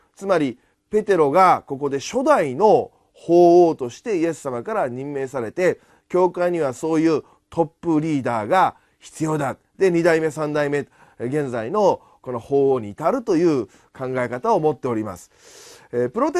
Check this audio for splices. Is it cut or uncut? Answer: uncut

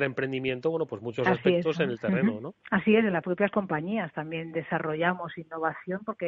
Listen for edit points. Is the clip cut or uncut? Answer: cut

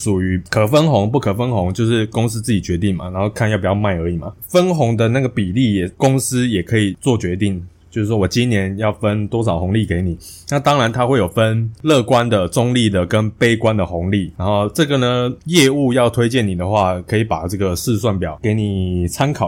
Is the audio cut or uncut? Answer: uncut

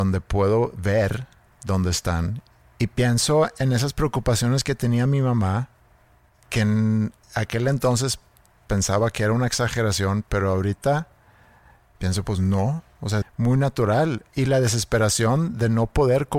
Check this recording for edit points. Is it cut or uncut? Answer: cut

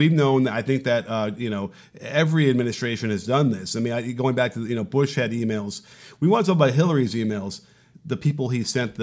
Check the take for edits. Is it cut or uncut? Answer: cut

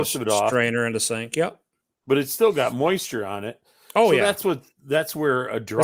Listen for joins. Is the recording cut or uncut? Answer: uncut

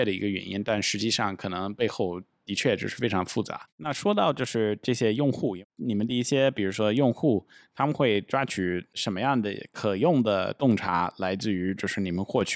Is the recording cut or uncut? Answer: cut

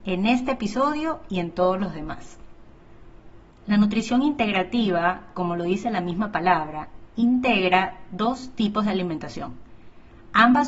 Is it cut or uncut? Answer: uncut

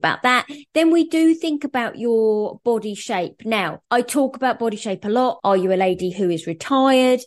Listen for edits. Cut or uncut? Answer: cut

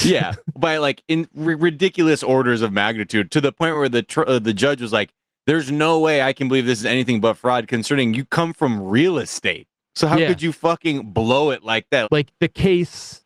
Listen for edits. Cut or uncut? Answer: cut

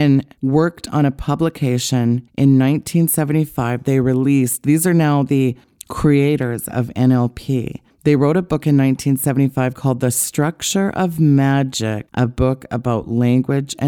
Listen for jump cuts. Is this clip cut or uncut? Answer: uncut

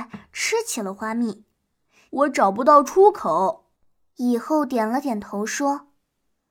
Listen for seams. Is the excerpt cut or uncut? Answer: cut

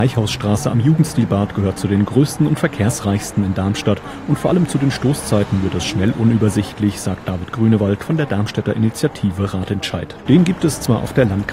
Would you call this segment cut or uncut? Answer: cut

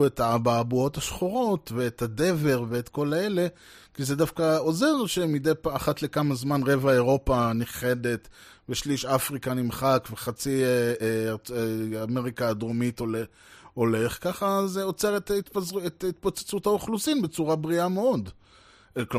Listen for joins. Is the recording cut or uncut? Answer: uncut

